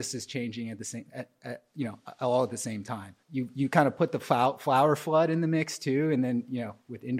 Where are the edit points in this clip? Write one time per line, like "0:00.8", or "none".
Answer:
0:03.2